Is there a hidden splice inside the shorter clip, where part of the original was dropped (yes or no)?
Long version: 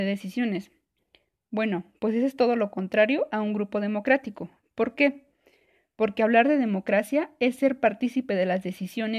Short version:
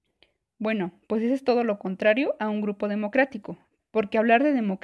yes